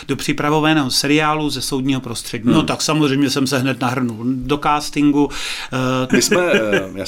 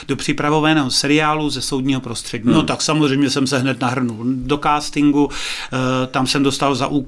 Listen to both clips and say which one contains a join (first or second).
first